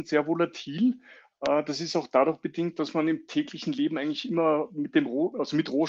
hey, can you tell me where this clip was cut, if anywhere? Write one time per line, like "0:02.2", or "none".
none